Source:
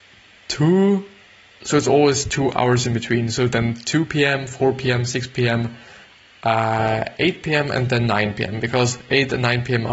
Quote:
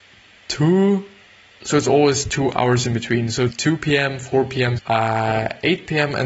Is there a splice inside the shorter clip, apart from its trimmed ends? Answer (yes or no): yes